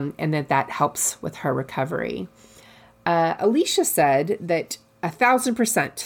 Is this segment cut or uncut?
cut